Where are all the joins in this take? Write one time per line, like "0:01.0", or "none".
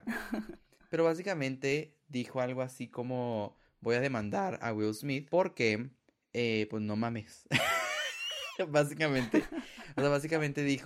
none